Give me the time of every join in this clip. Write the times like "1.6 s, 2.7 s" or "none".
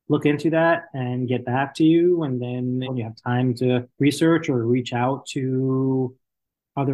2.9 s, 3.9 s